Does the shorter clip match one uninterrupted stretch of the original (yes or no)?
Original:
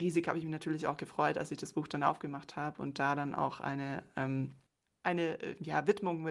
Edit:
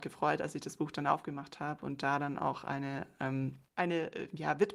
no